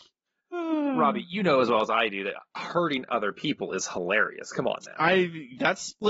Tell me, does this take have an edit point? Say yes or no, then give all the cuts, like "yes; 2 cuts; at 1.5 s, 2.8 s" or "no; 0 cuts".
no; 0 cuts